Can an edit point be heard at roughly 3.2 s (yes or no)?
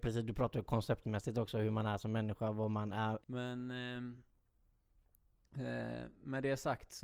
yes